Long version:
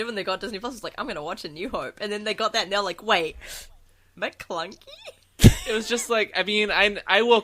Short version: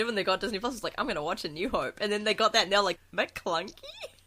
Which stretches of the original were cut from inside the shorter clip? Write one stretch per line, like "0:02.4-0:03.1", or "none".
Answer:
0:03.0-0:04.0